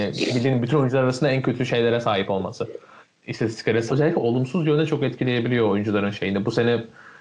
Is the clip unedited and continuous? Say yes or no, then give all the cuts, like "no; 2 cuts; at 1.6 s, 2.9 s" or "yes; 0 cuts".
no; 1 cut; at 3.9 s